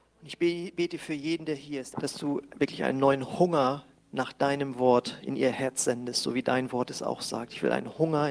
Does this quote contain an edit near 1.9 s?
yes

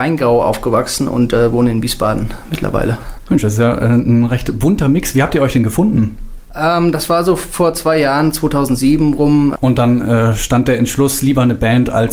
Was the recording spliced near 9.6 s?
yes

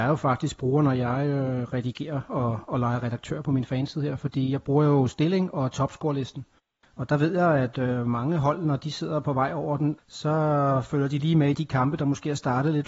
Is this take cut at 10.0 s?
yes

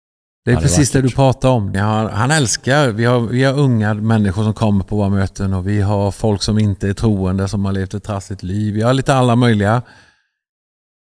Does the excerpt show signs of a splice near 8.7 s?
no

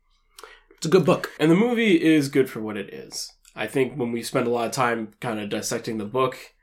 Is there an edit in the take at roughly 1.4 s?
yes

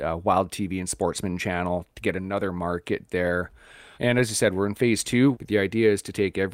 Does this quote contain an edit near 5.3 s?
yes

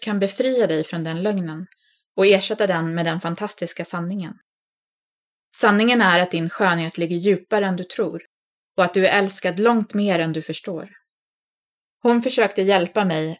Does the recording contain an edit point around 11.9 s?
yes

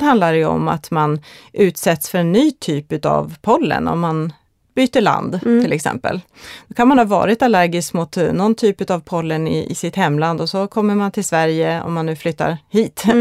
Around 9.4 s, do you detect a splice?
no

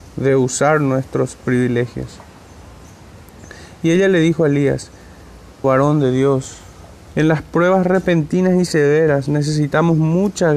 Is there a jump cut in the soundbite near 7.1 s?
yes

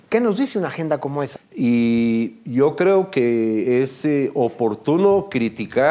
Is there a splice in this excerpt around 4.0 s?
no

